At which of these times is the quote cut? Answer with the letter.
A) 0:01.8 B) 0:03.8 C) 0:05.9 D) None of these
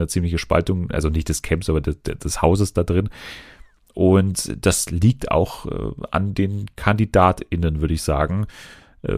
D